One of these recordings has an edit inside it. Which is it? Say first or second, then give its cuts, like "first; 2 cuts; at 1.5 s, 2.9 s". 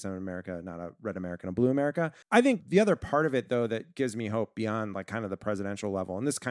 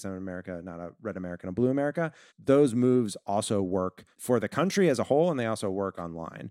first; 1 cut; at 2.2 s